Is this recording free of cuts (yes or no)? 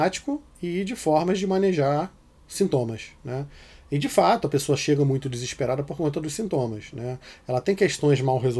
yes